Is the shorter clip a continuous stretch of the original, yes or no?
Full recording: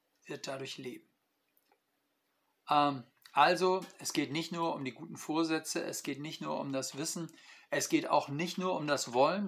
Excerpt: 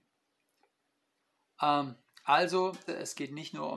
no